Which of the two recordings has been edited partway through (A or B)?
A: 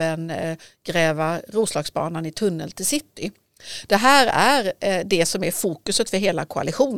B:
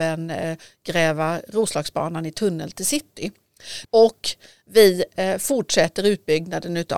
B